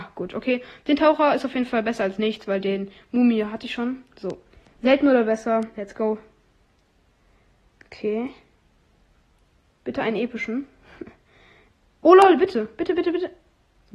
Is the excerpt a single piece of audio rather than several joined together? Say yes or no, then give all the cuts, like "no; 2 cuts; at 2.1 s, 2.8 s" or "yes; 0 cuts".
yes; 0 cuts